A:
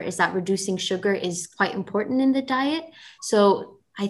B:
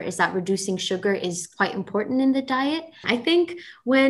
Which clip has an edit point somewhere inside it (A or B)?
B